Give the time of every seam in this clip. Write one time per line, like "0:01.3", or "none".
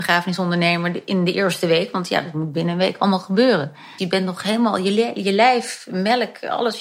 0:04.0